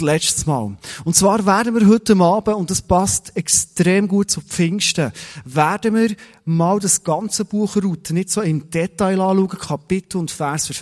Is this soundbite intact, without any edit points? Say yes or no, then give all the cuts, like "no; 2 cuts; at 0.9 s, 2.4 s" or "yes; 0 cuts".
yes; 0 cuts